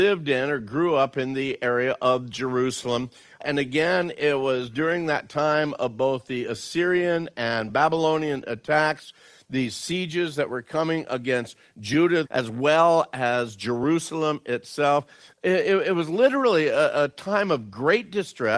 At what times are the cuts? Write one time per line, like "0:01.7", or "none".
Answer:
0:12.2